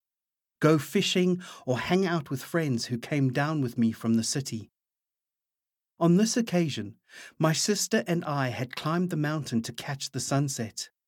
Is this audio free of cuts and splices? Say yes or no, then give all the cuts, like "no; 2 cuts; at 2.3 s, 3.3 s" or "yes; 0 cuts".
yes; 0 cuts